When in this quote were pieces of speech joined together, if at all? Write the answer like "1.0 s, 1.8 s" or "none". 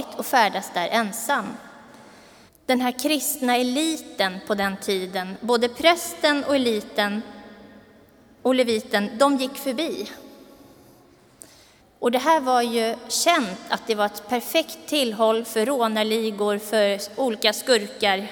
2.5 s, 11.8 s